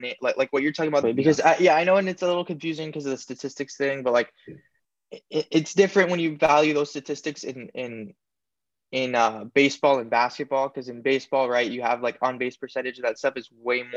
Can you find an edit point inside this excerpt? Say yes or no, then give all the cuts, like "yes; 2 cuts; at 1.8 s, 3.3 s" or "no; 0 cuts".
yes; 1 cut; at 1.0 s